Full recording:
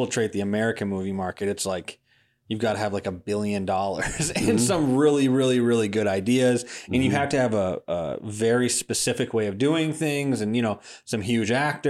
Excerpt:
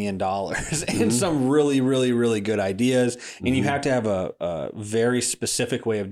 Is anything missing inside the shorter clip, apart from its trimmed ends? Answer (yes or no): no